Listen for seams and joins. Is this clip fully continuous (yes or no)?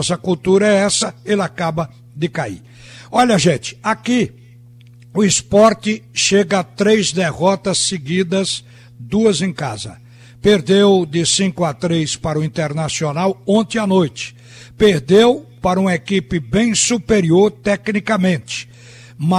yes